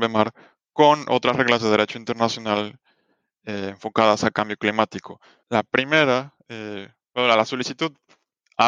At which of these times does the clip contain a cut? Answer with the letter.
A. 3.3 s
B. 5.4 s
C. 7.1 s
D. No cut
B